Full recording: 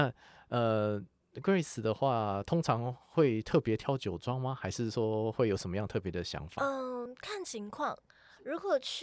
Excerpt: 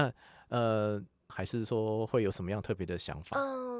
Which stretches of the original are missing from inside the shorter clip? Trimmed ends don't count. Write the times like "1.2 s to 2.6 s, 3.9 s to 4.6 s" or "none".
1.3 s to 4.6 s